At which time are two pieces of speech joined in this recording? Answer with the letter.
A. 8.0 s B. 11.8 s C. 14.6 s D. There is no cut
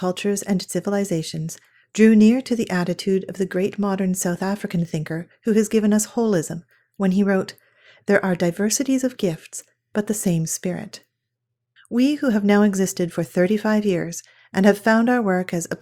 B